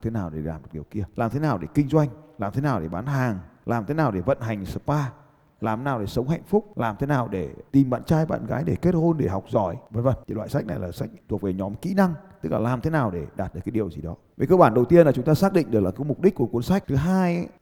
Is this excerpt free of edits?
yes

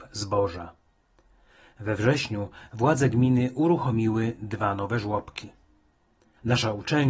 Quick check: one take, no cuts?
yes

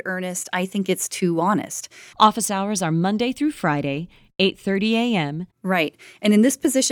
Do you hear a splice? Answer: yes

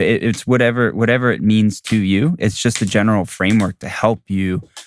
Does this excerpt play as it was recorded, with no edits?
yes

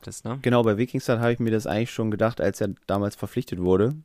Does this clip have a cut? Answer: no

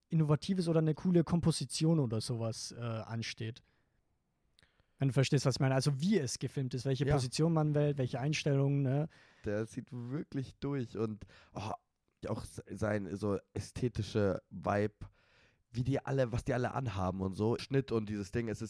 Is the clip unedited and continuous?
no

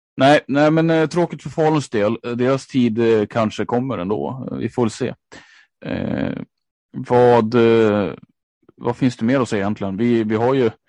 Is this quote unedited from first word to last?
yes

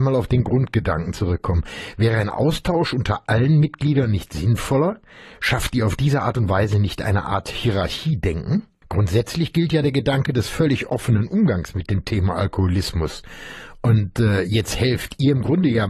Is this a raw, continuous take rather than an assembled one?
yes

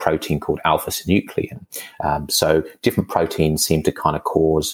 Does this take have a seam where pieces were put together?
no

